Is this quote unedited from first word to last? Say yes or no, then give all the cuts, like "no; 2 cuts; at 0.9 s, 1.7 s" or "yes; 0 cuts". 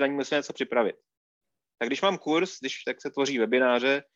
no; 1 cut; at 2.8 s